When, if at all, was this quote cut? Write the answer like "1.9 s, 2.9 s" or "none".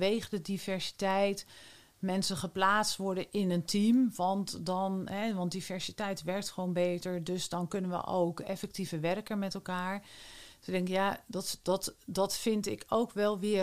none